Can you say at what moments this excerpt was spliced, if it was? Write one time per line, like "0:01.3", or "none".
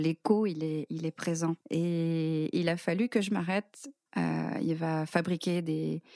0:01.6
0:04.1